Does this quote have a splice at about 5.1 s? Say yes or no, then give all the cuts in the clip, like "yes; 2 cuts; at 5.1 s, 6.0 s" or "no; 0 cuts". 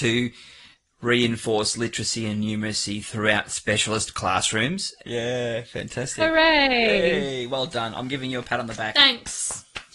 yes; 1 cut; at 5.1 s